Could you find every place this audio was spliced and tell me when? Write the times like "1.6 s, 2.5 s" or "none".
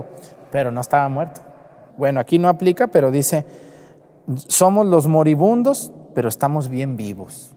1.9 s